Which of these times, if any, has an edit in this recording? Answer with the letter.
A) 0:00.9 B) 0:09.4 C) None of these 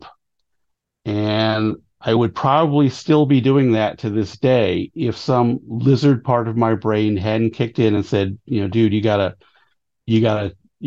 C